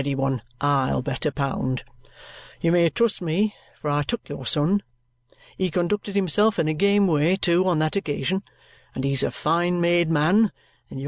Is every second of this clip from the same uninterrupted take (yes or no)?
yes